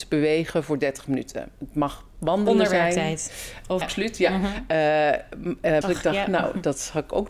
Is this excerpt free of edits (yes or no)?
no